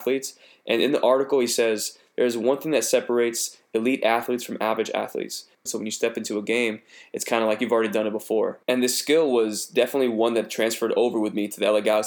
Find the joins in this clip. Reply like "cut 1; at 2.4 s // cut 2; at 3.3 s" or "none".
cut 1; at 5.7 s // cut 2; at 8.6 s